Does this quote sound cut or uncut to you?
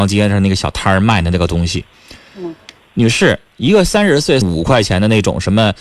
cut